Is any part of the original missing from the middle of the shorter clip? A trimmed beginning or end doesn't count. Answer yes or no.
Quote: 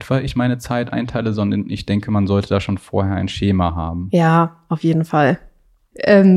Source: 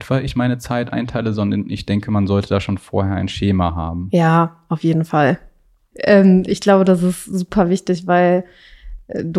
no